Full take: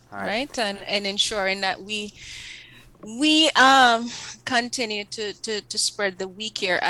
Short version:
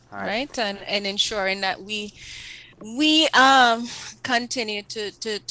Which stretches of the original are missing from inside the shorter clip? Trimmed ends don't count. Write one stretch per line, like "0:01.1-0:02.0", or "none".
0:02.7-0:02.9